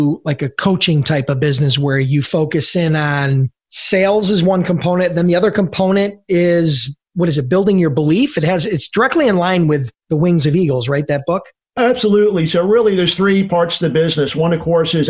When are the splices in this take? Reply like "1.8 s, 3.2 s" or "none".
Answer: none